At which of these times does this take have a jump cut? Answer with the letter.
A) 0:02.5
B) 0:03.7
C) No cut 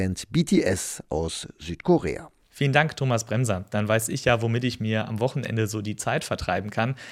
C